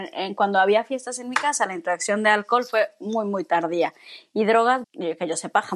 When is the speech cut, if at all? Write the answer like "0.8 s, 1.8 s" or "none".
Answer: 4.8 s